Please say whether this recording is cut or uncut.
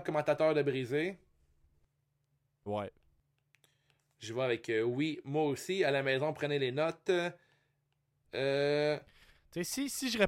cut